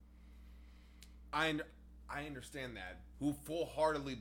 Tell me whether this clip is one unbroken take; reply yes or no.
no